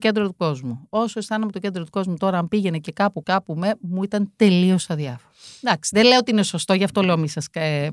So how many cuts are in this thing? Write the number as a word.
one